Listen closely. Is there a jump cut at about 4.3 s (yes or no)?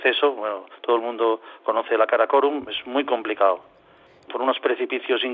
yes